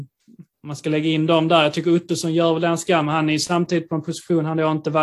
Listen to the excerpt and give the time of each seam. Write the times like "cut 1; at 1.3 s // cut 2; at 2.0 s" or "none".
none